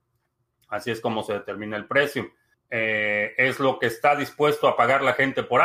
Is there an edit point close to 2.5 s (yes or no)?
yes